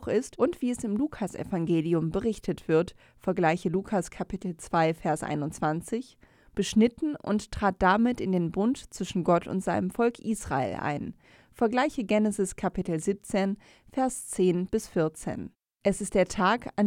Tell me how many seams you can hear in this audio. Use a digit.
0